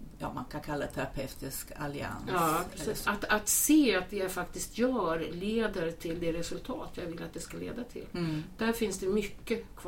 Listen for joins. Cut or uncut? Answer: cut